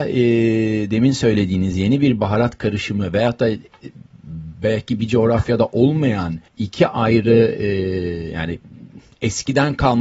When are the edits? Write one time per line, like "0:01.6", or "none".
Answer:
0:06.5